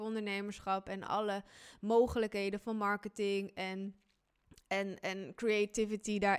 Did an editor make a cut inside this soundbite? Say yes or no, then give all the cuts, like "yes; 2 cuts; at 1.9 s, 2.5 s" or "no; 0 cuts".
no; 0 cuts